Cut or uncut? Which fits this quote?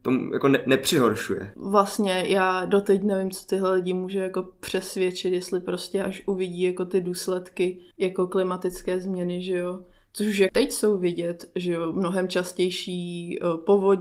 cut